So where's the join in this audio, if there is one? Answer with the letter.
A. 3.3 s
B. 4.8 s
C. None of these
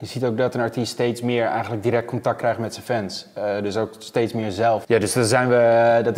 B